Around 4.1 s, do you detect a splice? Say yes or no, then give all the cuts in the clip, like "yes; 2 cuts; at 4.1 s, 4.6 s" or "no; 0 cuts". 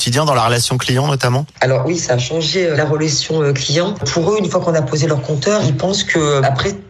no; 0 cuts